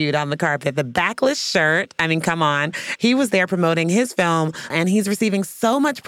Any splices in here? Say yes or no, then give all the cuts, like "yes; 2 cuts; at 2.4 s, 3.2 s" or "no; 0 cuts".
yes; 2 cuts; at 3.0 s, 4.7 s